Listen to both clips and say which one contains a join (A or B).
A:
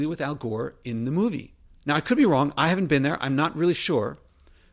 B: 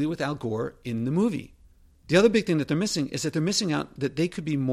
A